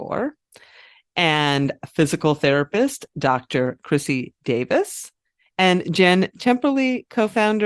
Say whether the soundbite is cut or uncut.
uncut